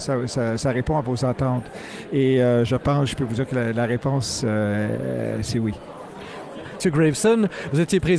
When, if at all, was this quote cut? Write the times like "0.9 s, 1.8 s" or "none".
6.8 s